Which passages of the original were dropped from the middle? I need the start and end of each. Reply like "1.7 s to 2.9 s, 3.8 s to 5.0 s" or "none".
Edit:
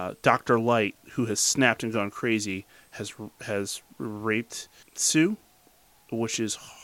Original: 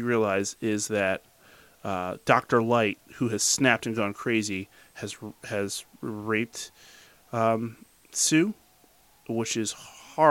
6.9 s to 8.0 s

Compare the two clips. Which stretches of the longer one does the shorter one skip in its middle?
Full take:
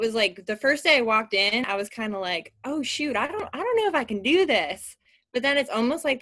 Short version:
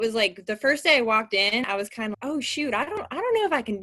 2.1 s to 2.6 s

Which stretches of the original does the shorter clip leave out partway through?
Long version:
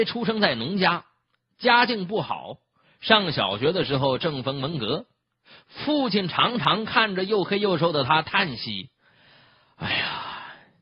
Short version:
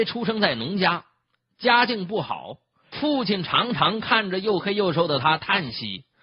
2.9 s to 5.8 s

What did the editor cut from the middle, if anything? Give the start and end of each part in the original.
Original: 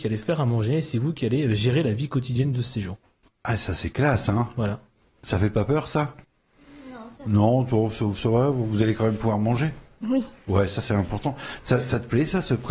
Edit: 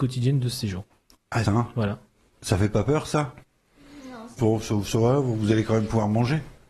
3.6 s to 4.3 s, 7.2 s to 7.7 s

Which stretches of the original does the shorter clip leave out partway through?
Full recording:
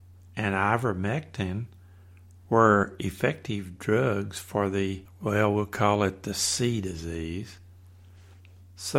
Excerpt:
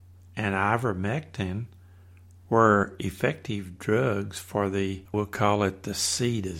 5.1 s to 5.5 s

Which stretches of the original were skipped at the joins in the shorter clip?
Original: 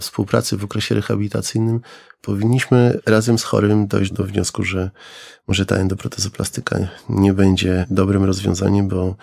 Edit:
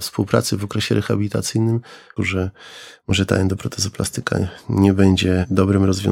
2.2 s to 4.6 s

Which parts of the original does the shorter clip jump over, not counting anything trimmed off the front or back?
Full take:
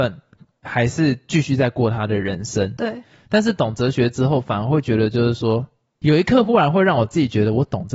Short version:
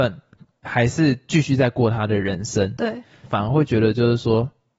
3.2 s to 4.4 s

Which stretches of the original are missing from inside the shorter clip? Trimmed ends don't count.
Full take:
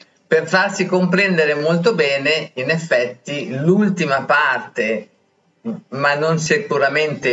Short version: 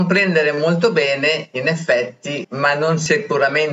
3.5 s to 5.8 s

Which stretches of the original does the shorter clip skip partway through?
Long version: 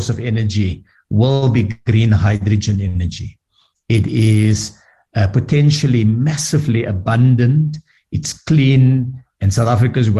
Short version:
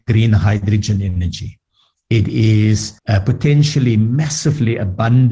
4.8 s to 5.1 s

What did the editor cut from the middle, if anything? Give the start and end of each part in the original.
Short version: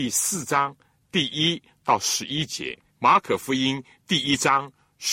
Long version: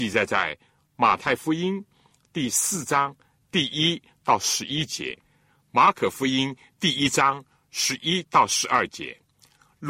5.3 s to 5.6 s

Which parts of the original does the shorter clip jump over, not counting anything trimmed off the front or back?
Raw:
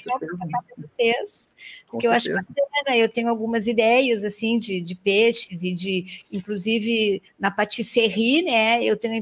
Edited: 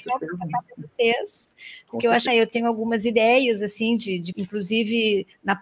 2.3 s to 2.9 s, 4.9 s to 6.3 s

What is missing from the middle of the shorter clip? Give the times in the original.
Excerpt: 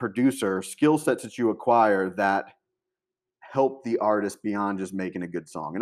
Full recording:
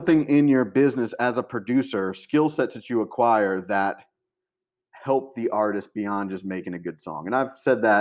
none

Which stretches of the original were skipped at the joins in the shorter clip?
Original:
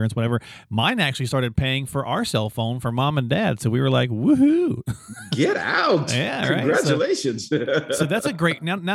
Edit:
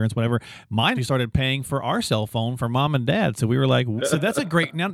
1.0 s to 1.2 s, 4.2 s to 7.9 s

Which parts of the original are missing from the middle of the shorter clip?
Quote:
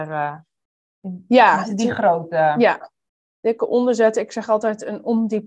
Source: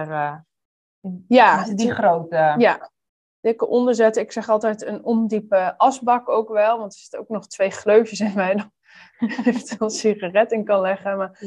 none

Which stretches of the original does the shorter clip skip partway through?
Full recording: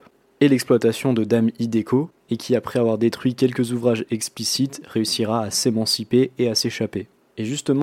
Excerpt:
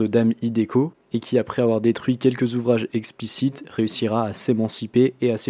none

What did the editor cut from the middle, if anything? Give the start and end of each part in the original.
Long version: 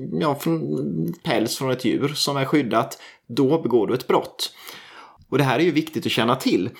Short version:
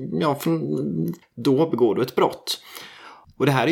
1.2 s to 3.1 s

